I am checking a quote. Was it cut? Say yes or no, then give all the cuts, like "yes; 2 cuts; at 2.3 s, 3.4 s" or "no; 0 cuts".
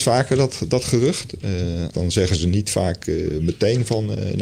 yes; 1 cut; at 1.9 s